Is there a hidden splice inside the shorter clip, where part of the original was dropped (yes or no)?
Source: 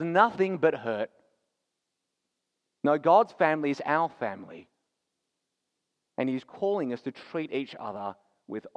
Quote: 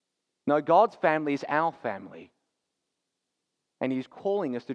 no